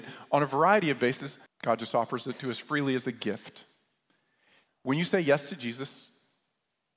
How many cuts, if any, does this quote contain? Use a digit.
2